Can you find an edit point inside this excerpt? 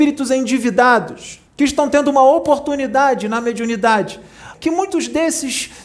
yes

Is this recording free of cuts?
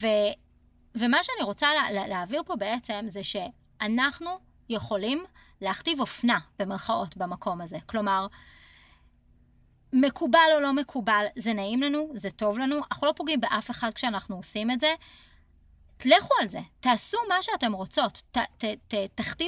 yes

